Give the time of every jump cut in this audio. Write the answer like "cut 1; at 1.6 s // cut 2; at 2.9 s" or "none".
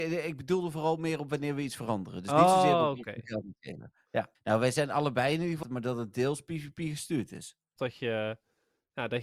cut 1; at 4.3 s // cut 2; at 5.6 s // cut 3; at 7.8 s